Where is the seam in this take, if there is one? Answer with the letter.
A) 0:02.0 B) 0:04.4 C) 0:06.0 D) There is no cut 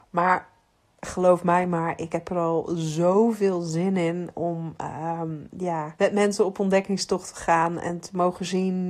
C